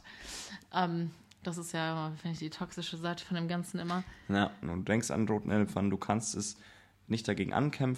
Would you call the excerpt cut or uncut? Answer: cut